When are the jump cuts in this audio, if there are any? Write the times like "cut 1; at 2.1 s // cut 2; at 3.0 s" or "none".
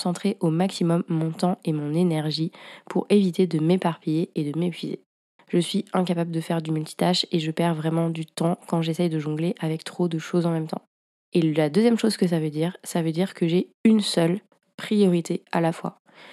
cut 1; at 5.4 s